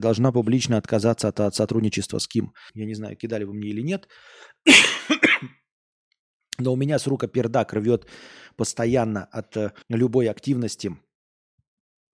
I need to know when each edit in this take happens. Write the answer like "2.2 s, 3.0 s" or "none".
2.7 s, 9.8 s